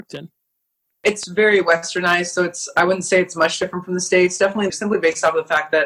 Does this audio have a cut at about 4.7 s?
yes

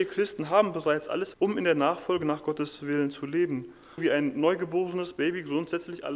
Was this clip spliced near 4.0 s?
yes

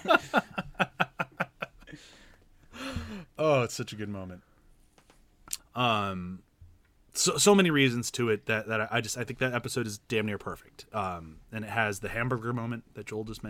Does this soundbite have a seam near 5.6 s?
yes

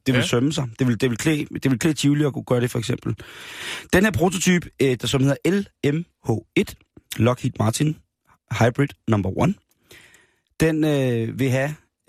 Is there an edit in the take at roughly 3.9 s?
no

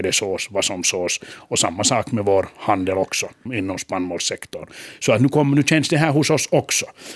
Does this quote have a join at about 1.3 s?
no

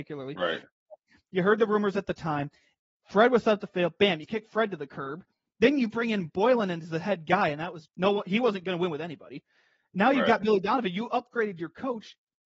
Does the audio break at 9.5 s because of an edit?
no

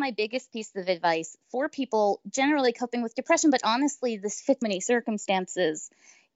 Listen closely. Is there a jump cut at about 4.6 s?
yes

